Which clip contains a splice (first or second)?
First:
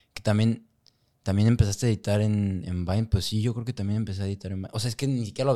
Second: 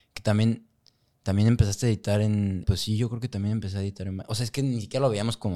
second